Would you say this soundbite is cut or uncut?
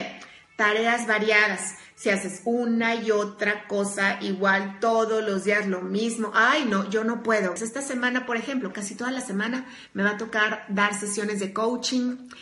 cut